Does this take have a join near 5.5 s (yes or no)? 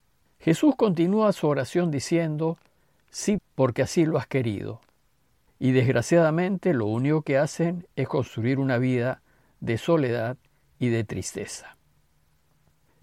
yes